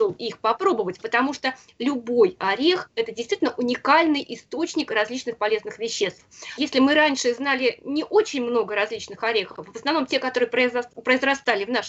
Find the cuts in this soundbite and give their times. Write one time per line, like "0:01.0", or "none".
0:06.6